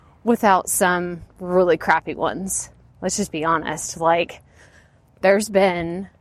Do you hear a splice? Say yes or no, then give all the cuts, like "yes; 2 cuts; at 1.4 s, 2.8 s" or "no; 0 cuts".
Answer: no; 0 cuts